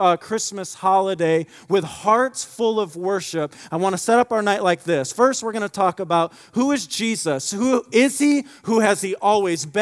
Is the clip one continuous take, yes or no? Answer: yes